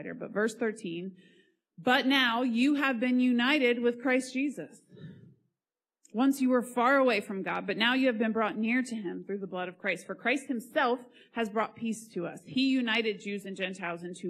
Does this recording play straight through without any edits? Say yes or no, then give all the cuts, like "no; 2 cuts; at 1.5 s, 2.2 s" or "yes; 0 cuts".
yes; 0 cuts